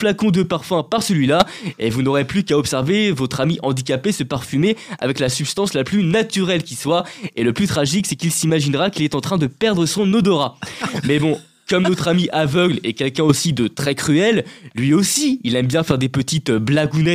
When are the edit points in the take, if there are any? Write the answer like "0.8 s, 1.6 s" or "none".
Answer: 11.0 s